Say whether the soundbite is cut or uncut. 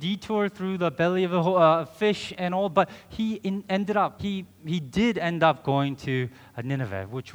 cut